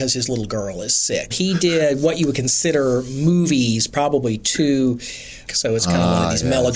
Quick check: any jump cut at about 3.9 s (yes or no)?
no